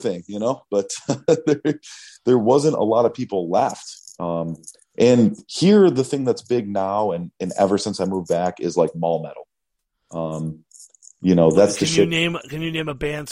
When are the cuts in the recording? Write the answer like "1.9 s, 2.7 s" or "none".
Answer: none